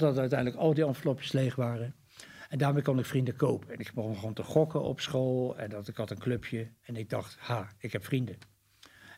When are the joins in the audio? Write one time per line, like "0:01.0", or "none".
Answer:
none